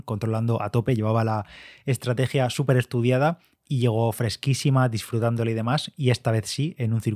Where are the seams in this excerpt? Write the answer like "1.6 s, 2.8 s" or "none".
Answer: none